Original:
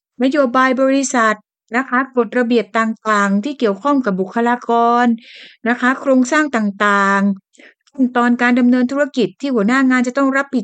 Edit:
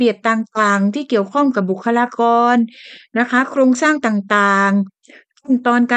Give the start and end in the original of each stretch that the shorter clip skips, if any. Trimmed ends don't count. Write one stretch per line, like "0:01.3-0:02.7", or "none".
none